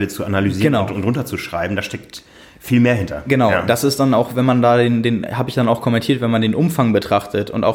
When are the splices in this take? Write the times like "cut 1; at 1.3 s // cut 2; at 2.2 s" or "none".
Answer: none